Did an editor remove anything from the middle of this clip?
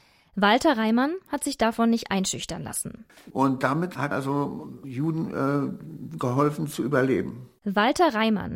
yes; 2 cuts; at 3.1 s, 4.1 s

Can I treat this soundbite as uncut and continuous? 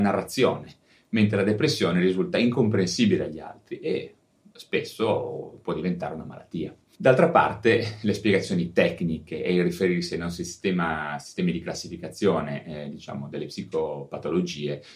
yes; 0 cuts

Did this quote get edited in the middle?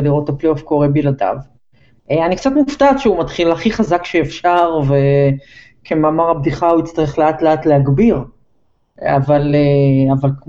no; 0 cuts

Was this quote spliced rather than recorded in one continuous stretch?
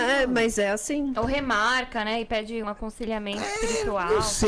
yes; 1 cut; at 2.6 s

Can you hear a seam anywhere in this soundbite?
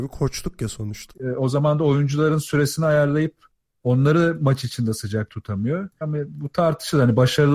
yes; 2 cuts; at 1.1 s, 6.0 s

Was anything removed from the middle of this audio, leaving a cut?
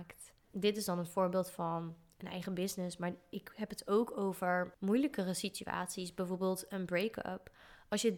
no; 0 cuts

